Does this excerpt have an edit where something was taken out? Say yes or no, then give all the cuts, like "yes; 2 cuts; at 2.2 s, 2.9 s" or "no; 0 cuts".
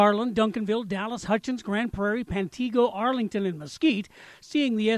no; 0 cuts